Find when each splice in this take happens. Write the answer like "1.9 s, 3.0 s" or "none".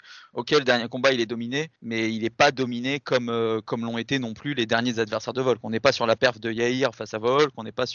1.8 s

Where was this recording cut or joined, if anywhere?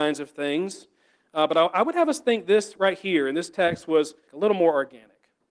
4.3 s

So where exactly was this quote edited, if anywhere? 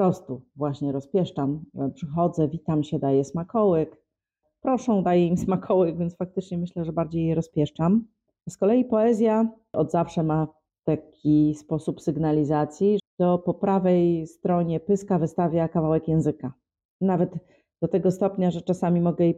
8.4 s, 13.0 s

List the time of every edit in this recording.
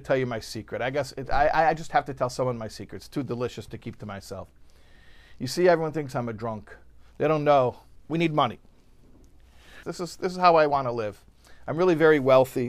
8.0 s, 9.8 s

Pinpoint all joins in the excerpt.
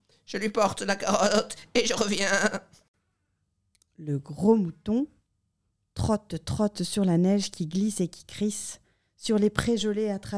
none

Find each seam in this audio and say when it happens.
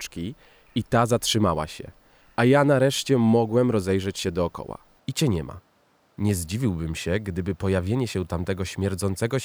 5.0 s

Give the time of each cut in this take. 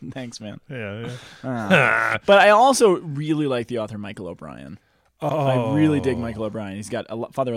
none

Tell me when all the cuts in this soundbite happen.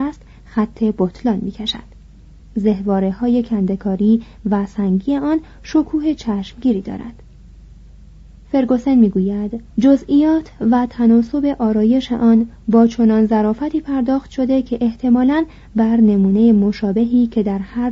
2.4 s, 9.7 s

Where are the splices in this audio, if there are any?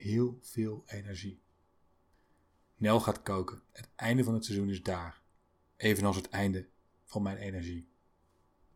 3.6 s

